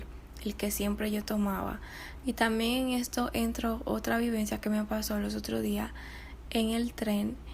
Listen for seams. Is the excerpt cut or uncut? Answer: cut